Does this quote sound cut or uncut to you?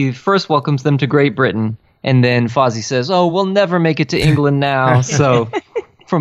uncut